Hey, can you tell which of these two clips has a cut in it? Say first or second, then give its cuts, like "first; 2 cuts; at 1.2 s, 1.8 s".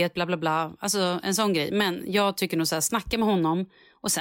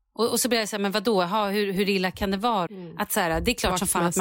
second; 1 cut; at 2.7 s